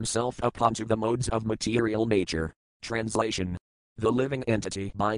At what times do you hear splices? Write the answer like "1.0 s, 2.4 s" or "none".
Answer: 2.7 s